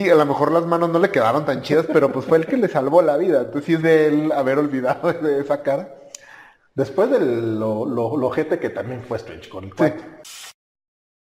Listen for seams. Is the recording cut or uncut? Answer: cut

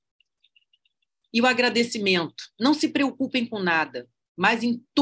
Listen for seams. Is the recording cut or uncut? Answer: cut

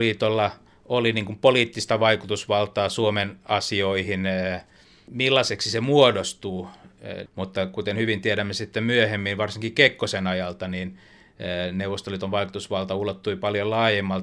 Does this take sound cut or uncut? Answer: cut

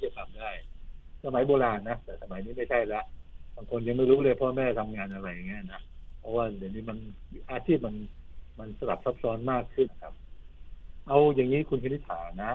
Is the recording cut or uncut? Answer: cut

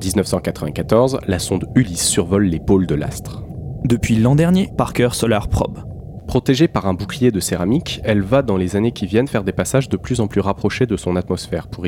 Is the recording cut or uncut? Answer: cut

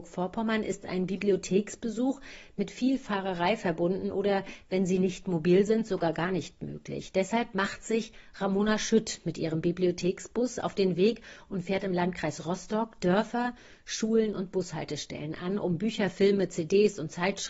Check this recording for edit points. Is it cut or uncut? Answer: uncut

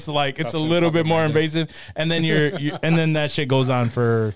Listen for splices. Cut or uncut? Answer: uncut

